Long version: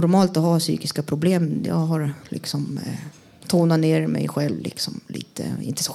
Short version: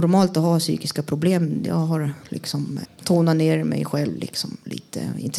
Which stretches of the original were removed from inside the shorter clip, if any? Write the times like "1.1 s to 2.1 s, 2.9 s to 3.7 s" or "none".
2.9 s to 3.3 s